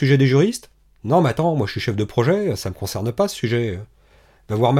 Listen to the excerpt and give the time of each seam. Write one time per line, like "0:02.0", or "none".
none

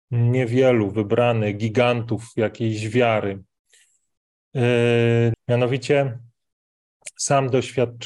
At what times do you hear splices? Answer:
0:05.3

